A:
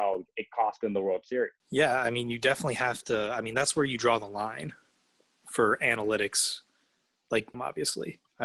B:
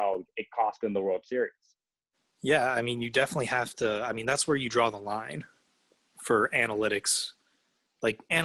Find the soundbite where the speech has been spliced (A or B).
A